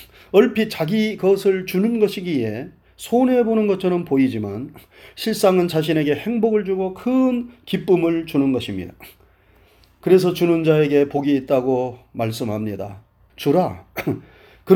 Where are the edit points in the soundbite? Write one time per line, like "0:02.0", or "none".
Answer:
0:13.3

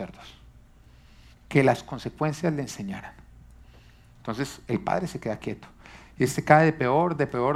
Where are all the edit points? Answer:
0:01.3

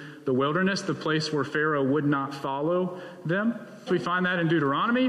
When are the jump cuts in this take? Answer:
0:03.9

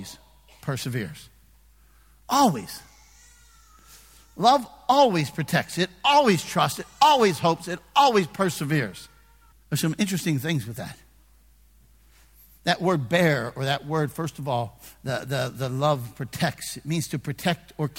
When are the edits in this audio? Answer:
0:09.5

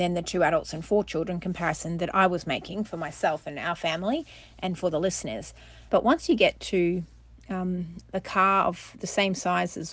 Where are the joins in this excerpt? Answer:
0:05.9

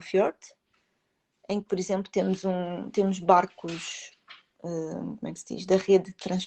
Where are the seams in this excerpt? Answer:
none

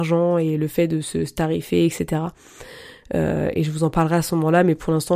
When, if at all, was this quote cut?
none

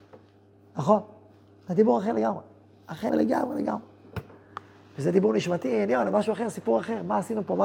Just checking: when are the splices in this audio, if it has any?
0:03.1

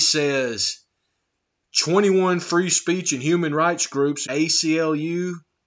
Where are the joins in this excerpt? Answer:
0:04.3

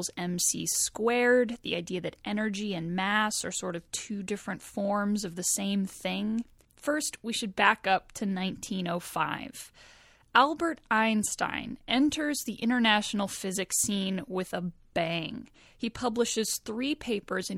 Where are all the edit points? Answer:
0:06.6

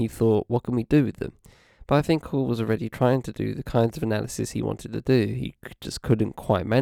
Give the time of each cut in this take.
none

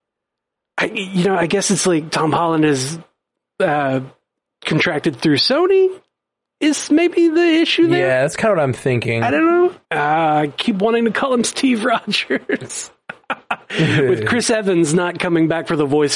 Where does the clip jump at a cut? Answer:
0:09.8

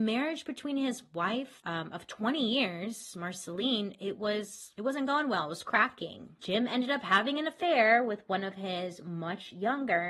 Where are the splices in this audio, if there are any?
0:06.4

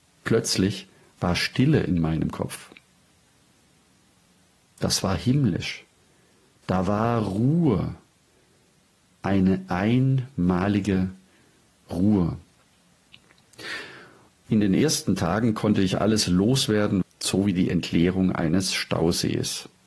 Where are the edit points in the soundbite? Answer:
0:14.3
0:17.0

